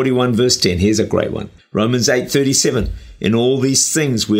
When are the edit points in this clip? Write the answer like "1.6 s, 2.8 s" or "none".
1.6 s